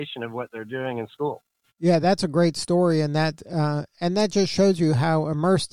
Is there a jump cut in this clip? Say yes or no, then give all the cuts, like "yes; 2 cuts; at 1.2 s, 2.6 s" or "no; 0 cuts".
yes; 1 cut; at 1.7 s